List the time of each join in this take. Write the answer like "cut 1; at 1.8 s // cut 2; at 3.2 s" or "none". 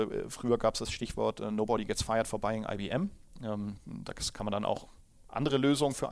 none